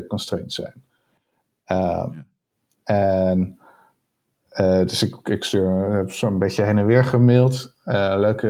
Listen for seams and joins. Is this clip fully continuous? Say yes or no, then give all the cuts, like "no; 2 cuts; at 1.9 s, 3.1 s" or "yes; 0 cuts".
yes; 0 cuts